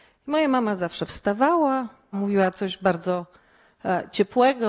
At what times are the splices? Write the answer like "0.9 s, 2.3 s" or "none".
2.1 s